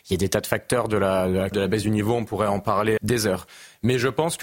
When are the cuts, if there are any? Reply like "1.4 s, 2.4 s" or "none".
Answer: 1.5 s, 3.0 s